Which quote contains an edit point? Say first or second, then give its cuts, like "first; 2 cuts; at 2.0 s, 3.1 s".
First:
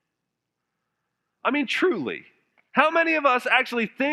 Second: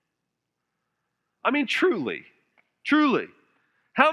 first; 1 cut; at 2.7 s